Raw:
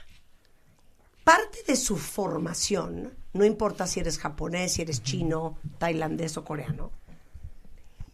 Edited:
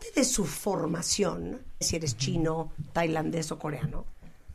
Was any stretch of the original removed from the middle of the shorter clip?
yes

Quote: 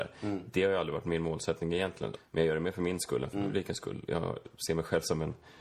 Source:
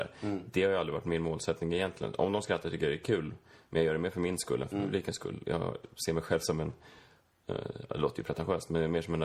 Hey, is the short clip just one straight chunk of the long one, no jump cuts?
no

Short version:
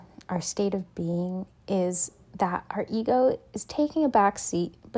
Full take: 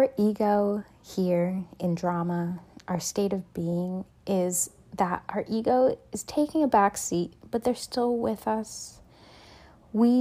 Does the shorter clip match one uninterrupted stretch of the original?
yes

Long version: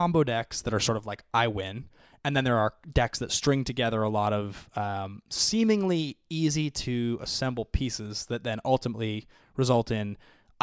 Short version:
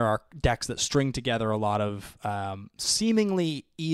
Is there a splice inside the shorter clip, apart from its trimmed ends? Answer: no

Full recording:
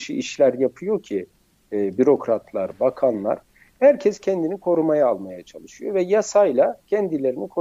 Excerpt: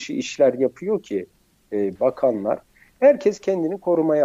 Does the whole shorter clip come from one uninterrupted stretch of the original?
no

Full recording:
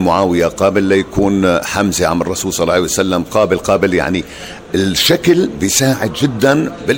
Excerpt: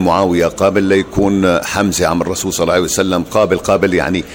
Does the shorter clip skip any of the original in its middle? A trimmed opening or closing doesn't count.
no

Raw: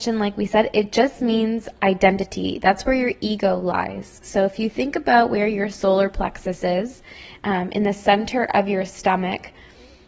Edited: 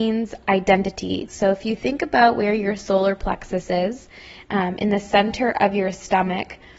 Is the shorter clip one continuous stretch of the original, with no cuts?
no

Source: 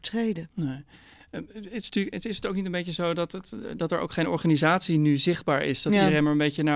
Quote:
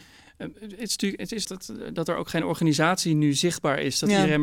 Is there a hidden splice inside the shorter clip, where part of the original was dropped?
yes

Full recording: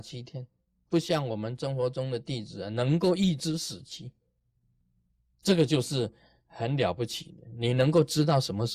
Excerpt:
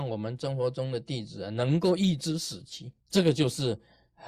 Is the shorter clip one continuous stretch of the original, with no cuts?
no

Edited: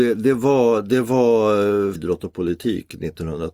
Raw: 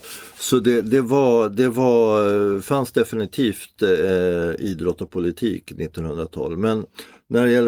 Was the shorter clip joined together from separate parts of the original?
yes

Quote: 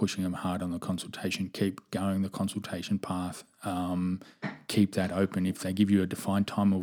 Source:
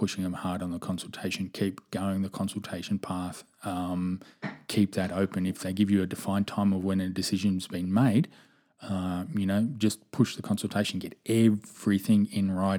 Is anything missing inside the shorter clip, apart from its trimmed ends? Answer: no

